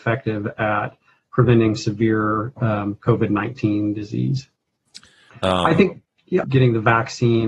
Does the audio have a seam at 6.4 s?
yes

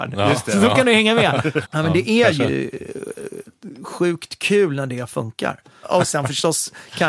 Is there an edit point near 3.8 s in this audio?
no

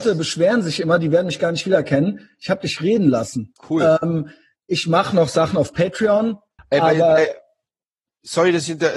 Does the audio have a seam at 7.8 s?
no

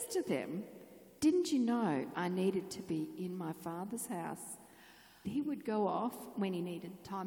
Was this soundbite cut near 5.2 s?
yes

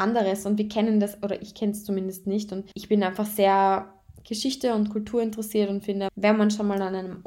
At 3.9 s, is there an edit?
no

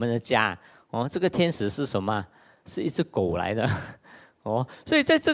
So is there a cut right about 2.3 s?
no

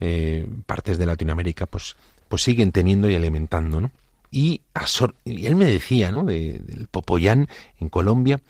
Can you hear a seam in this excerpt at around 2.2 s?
no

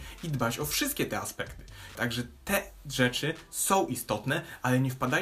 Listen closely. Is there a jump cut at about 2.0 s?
yes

